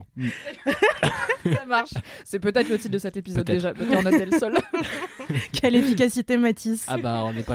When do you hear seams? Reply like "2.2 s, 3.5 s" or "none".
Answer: none

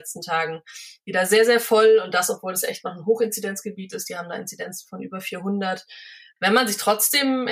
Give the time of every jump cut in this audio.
none

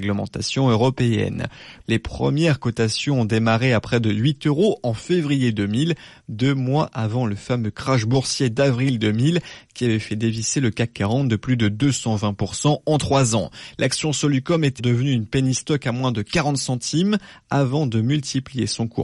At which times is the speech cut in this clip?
1.8 s, 14.8 s

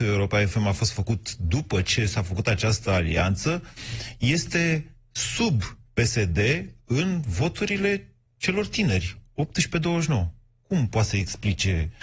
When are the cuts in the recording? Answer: none

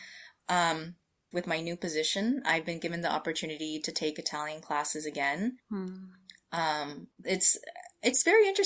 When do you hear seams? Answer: 1.3 s, 5.6 s, 7.2 s

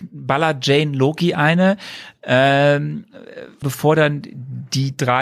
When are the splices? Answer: 3.6 s

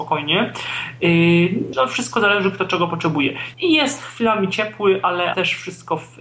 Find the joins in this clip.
1.7 s, 3.5 s

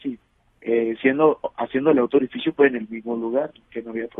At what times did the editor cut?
none

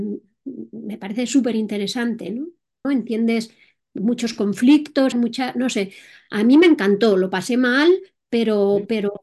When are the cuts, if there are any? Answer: 2.8 s, 5.1 s

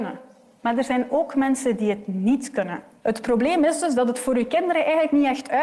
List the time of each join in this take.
3.0 s

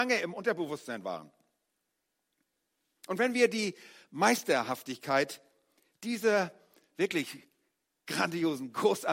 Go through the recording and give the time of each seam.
none

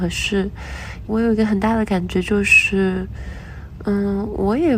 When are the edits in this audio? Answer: 1.1 s

